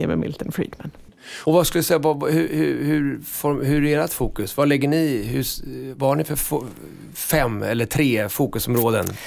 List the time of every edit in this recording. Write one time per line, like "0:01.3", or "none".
none

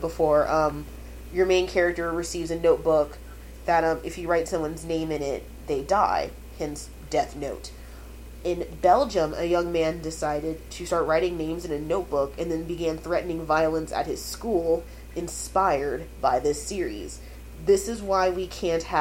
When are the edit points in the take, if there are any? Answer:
none

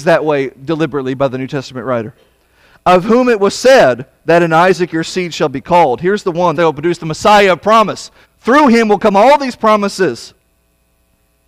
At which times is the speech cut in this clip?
0:06.5
0:08.2

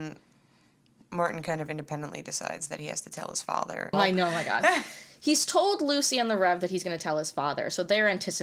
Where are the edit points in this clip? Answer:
0:03.9

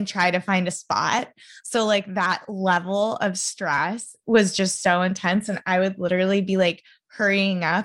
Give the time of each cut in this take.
none

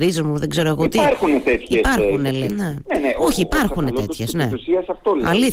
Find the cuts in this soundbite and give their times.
0:02.5

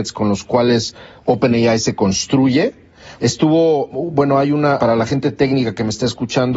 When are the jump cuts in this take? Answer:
0:03.2
0:04.8

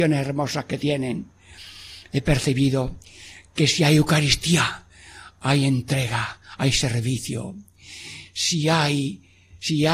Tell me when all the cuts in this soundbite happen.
none

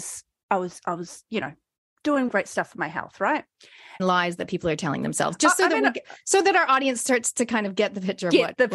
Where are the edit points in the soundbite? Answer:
0:02.3
0:04.0

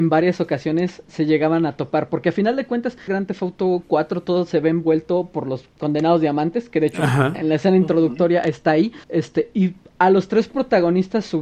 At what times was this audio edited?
0:03.1
0:09.0

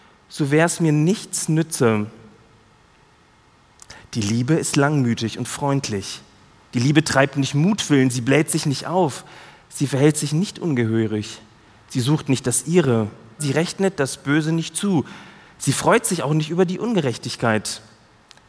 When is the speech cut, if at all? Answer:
0:06.7
0:13.4

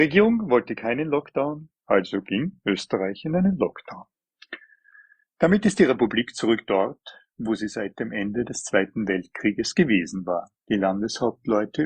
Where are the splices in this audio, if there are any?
0:01.8
0:10.6

